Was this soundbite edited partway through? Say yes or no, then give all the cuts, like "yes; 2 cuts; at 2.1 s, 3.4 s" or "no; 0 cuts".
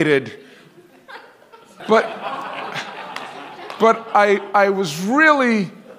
yes; 1 cut; at 1.8 s